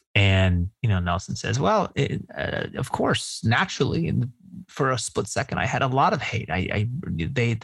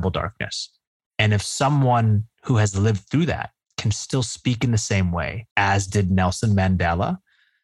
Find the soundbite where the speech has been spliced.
second; 2 cuts; at 1.1 s, 5.5 s

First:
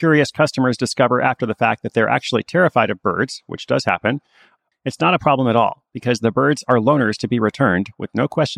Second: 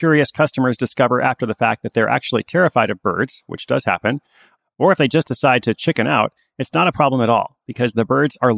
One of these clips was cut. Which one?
first; 1 cut; at 4.7 s

